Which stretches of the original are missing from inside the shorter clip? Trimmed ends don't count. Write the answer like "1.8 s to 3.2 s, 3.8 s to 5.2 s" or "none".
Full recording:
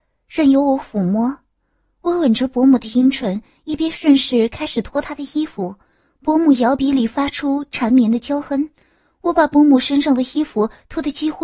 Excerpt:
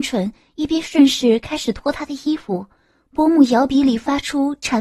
none